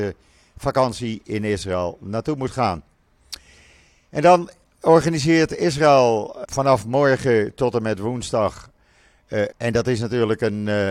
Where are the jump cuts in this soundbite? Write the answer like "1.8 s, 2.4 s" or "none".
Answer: 6.4 s, 9.5 s